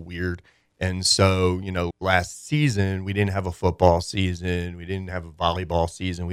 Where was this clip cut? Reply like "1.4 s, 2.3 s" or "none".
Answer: 1.9 s